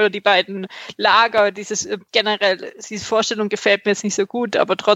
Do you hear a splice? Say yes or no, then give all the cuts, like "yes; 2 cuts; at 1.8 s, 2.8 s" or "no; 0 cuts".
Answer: no; 0 cuts